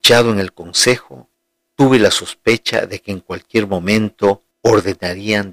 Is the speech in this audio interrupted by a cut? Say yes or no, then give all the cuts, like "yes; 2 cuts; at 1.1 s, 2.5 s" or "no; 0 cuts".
yes; 1 cut; at 4.5 s